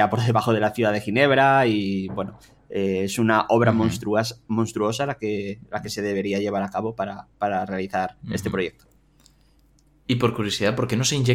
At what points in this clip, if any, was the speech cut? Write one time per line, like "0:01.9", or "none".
none